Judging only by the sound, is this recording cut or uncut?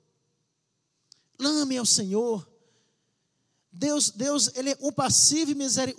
uncut